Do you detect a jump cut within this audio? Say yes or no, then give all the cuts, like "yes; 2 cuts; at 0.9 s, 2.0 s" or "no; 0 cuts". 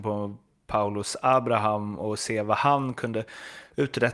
no; 0 cuts